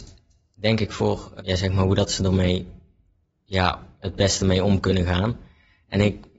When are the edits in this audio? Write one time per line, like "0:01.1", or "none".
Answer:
0:01.4